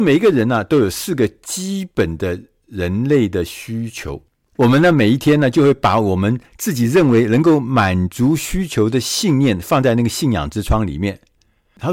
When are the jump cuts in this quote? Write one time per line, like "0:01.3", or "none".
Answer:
none